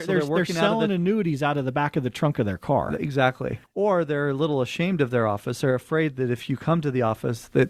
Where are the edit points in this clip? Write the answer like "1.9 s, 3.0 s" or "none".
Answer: none